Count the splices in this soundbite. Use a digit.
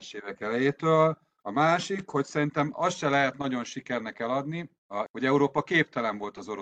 2